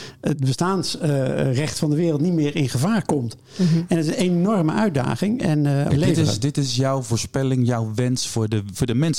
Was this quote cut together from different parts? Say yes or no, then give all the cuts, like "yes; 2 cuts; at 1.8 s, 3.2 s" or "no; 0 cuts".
yes; 1 cut; at 5.9 s